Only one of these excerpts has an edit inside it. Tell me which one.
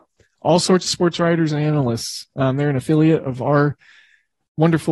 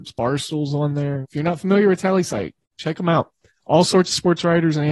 second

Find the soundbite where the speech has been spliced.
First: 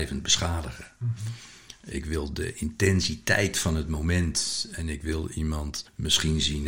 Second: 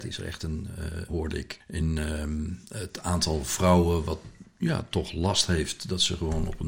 second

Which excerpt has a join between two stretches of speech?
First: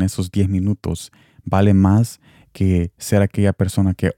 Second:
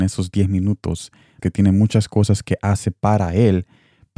second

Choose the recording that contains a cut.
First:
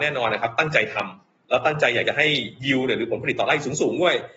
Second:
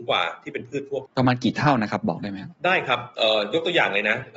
second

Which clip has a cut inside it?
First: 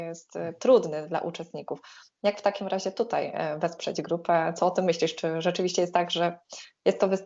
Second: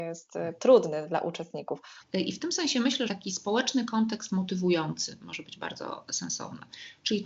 second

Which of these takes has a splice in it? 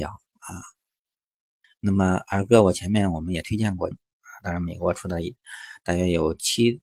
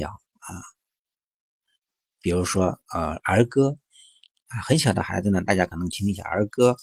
first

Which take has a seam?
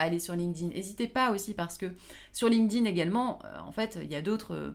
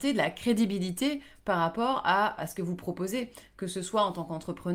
second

